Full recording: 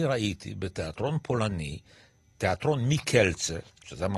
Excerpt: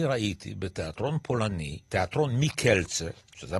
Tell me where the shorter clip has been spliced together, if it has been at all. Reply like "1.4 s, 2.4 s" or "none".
1.8 s